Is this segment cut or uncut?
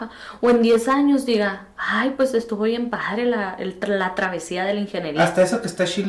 uncut